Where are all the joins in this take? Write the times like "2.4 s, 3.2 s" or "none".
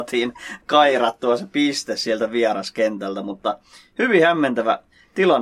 none

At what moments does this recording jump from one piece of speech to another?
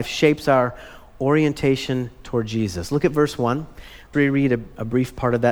4.1 s

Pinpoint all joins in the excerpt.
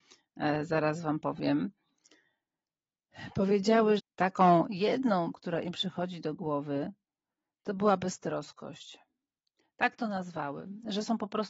4.0 s, 5.3 s

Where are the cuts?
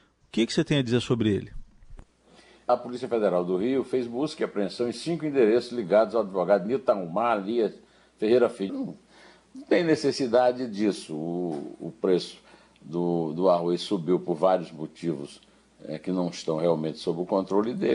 2.7 s, 8.7 s

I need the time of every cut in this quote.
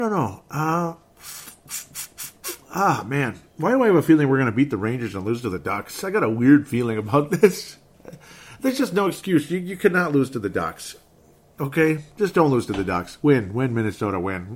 none

